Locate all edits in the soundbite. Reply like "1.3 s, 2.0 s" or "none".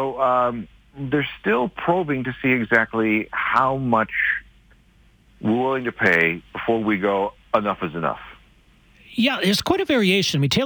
none